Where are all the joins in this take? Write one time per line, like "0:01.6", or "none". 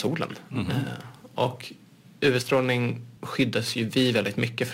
0:03.2